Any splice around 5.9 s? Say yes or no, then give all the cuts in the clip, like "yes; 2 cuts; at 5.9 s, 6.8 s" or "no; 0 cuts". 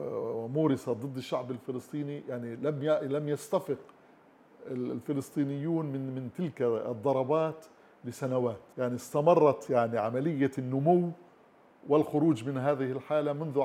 no; 1 cut; at 8.7 s